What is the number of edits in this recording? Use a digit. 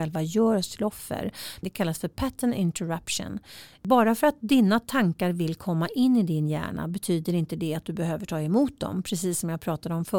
1